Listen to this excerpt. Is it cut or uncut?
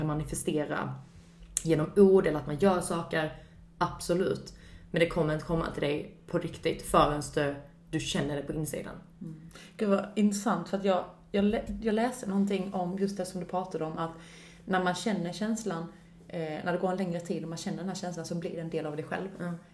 uncut